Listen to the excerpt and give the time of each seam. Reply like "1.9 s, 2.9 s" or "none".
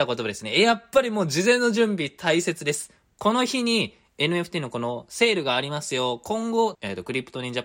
6.7 s